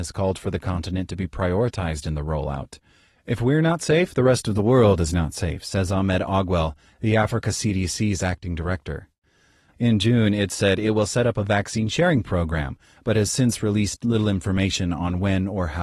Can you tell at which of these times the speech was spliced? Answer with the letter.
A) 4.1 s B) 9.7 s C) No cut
B